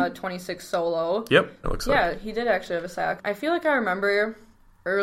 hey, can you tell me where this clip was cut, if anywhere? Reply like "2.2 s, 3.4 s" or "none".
1.6 s, 3.2 s